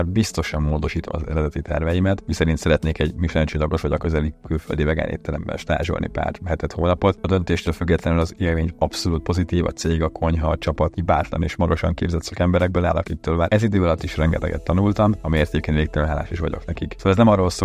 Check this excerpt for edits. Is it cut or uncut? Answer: cut